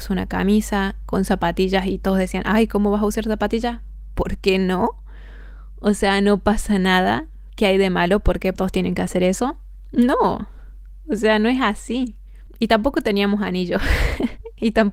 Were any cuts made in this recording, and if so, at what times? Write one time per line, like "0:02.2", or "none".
0:08.5